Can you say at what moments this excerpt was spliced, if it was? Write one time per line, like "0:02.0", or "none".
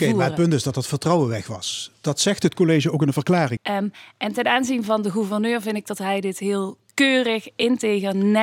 0:03.6